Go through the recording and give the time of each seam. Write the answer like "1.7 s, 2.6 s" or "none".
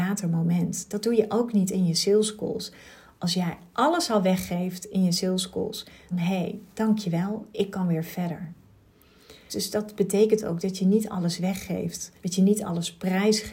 6.1 s, 9.5 s, 12.2 s